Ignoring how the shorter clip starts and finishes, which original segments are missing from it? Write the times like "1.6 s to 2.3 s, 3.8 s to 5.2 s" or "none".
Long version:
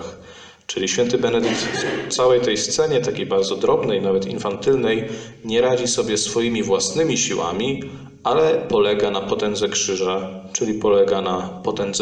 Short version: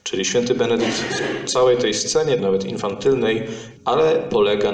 3.0 s to 4.0 s, 5.4 s to 8.2 s